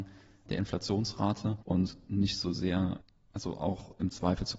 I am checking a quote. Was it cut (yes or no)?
yes